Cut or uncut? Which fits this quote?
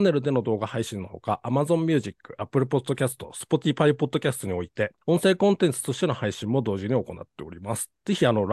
cut